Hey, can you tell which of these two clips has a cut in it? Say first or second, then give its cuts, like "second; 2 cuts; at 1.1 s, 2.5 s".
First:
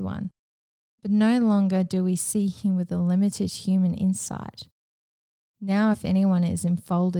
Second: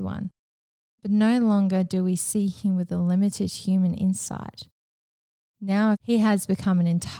second; 1 cut; at 5.9 s